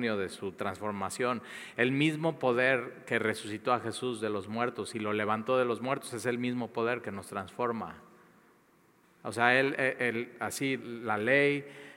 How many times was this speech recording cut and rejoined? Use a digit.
2